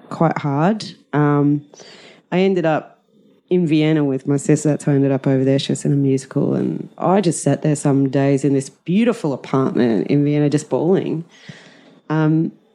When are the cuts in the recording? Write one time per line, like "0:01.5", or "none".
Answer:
none